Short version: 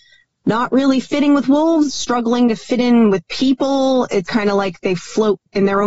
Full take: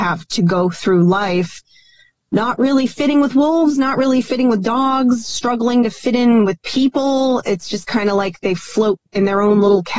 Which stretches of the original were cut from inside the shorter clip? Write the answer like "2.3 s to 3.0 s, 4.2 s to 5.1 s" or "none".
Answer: 3.7 s to 5.2 s, 7.6 s to 7.9 s